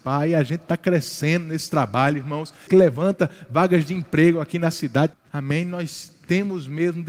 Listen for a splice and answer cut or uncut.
cut